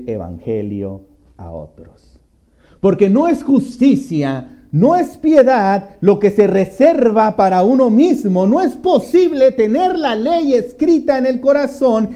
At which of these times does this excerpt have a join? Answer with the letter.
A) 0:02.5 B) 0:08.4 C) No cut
C